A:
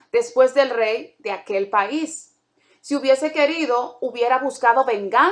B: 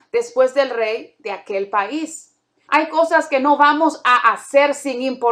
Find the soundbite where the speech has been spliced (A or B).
B